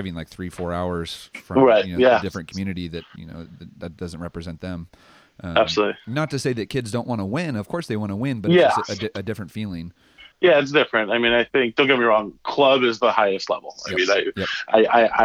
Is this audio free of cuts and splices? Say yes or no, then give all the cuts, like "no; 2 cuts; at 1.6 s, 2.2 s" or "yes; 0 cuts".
yes; 0 cuts